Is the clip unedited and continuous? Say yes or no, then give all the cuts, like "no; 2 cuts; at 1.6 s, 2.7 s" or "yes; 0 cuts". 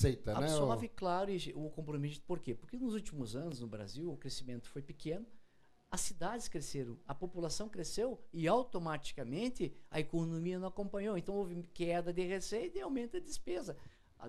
yes; 0 cuts